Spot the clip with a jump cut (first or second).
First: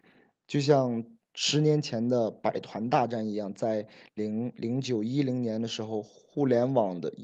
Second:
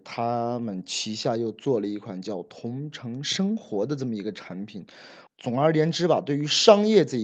second